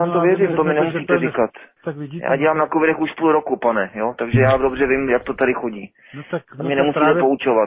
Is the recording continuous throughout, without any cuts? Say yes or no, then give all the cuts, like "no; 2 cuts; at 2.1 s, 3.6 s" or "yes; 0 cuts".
no; 1 cut; at 1.8 s